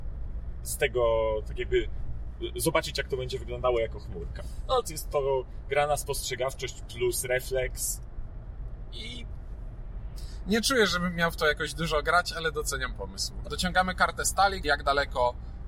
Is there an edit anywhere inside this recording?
yes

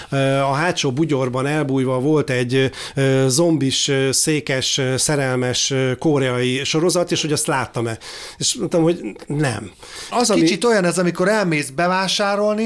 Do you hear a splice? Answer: yes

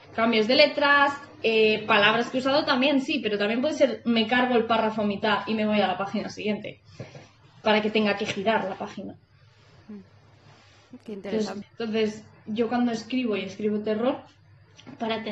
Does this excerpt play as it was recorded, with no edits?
no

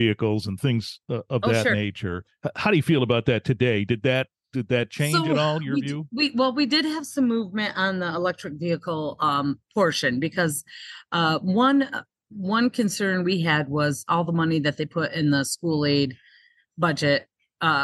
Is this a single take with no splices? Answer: yes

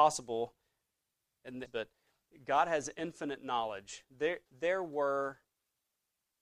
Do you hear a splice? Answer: yes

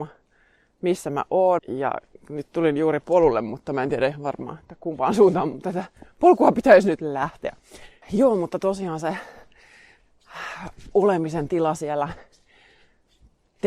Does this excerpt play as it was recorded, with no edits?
no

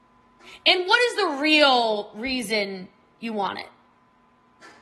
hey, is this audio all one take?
yes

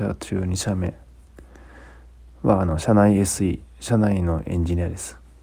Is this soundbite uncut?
yes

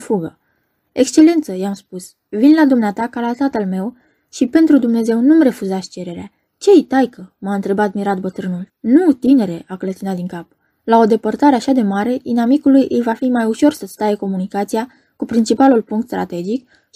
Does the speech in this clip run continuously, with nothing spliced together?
no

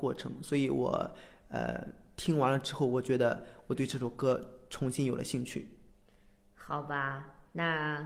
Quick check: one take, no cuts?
yes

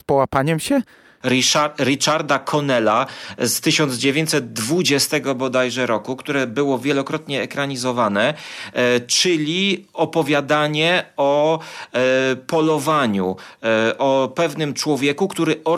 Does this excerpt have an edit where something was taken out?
yes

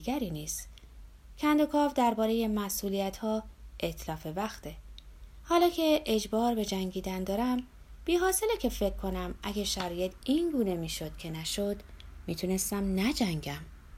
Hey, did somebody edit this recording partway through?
no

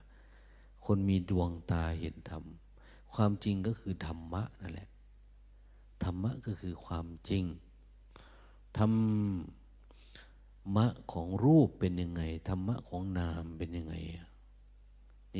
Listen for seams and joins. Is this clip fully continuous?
yes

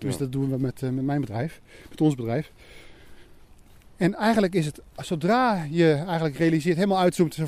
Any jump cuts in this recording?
no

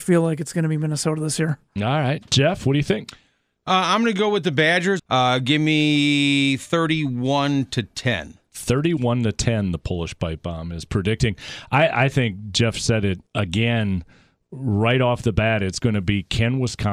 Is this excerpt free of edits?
no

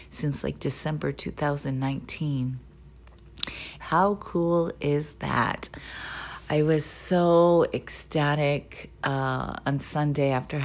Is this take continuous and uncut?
no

